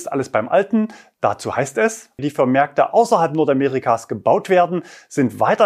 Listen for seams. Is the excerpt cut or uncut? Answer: cut